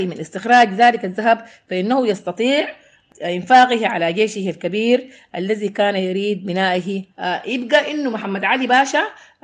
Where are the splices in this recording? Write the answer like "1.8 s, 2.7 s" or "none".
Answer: 7.1 s